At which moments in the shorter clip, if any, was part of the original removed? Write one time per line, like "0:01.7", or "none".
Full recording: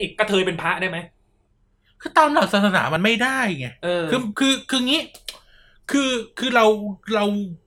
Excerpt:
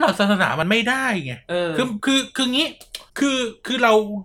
0:03.1